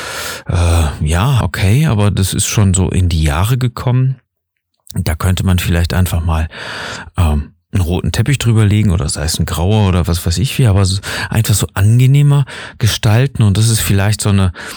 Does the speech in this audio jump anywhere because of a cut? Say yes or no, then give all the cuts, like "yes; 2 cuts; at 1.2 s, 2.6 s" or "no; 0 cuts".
yes; 1 cut; at 1.4 s